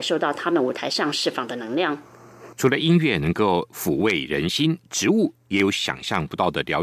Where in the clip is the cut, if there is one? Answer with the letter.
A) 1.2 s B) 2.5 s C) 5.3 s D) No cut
B